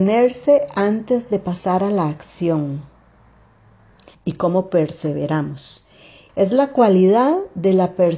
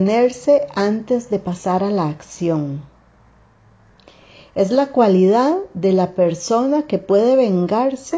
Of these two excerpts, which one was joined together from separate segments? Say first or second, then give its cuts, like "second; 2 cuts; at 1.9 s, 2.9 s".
first; 2 cuts; at 4.1 s, 6.3 s